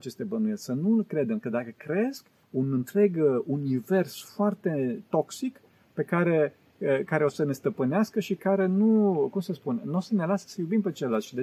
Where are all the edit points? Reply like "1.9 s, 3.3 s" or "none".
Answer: 2.4 s